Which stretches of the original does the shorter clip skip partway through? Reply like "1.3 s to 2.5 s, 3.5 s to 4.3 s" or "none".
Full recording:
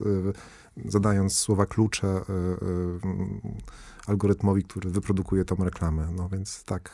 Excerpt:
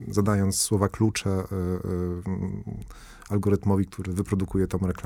none